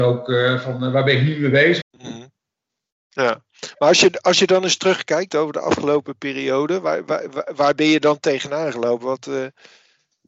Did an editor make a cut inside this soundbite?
yes; 1 cut; at 1.8 s

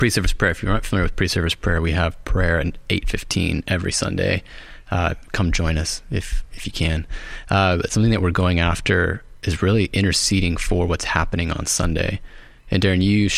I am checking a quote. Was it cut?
no; 0 cuts

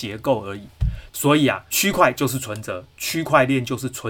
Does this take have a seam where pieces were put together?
yes; 1 cut; at 1.1 s

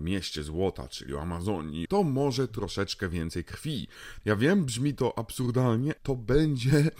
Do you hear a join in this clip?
yes; 3 cuts; at 1.9 s, 4.2 s, 6.0 s

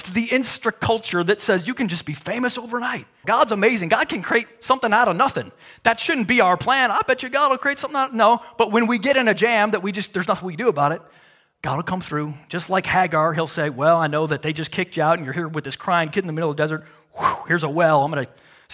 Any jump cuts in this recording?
yes; 1 cut; at 3.2 s

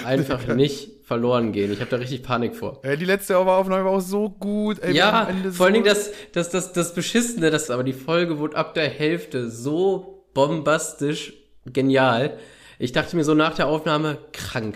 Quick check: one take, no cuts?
no; 1 cut; at 7.7 s

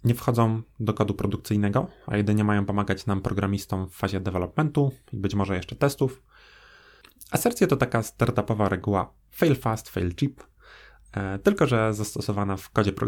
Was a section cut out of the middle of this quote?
no; 0 cuts

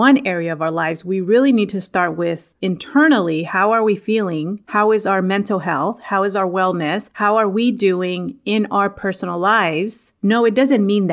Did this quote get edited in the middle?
yes; 1 cut; at 10.2 s

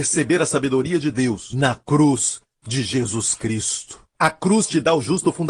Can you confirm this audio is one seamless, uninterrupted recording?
no; 1 cut; at 4.1 s

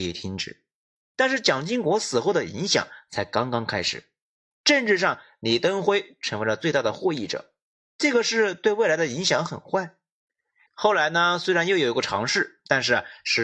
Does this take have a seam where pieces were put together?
yes; 2 cuts; at 0.9 s, 10.7 s

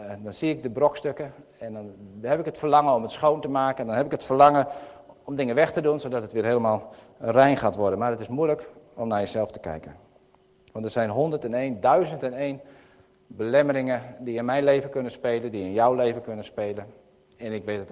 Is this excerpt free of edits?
yes; 0 cuts

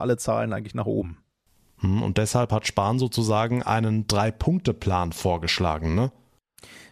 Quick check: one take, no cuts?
yes; 0 cuts

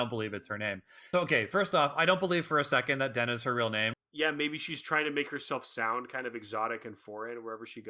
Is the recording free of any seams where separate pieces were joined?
no; 2 cuts; at 1.1 s, 3.9 s

